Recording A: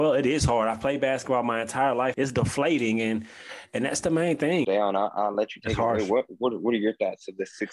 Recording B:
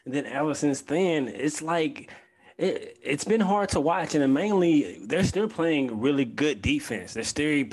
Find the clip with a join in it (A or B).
A